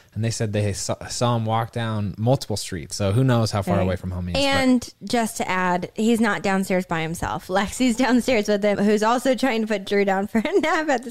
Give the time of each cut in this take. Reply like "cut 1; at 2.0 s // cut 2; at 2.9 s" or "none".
cut 1; at 8.7 s